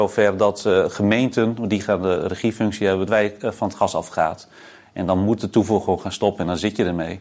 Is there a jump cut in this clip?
yes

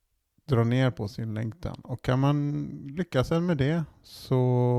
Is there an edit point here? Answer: no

